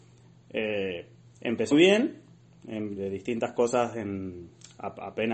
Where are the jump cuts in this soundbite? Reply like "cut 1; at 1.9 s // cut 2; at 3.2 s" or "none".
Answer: cut 1; at 1.7 s // cut 2; at 3.0 s